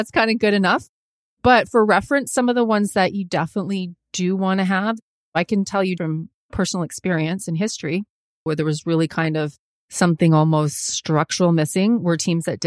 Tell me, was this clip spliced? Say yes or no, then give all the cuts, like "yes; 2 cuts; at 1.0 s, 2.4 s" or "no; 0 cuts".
yes; 2 cuts; at 6.0 s, 8.5 s